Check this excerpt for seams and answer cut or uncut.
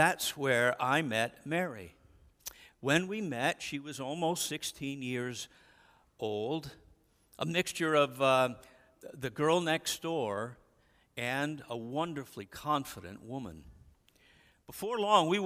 uncut